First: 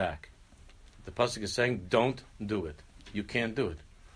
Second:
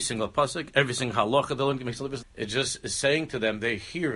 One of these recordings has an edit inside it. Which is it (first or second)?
second